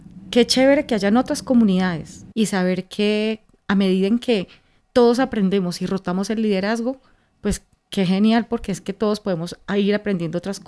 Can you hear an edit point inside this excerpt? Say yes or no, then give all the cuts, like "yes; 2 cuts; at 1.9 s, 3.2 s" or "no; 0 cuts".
yes; 1 cut; at 2.3 s